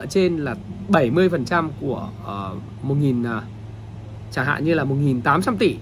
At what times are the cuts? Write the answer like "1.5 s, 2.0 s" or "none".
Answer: none